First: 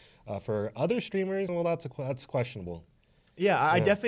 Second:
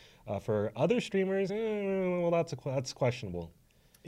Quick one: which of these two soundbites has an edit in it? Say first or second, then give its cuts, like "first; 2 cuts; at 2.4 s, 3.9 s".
first; 1 cut; at 1.5 s